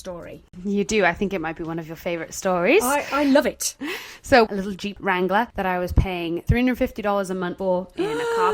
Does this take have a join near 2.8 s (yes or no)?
no